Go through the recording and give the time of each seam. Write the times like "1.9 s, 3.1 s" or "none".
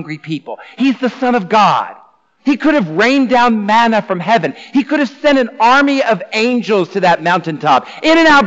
none